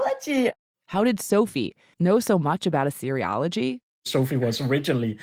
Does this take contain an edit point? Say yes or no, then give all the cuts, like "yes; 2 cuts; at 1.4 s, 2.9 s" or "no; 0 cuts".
yes; 1 cut; at 1.9 s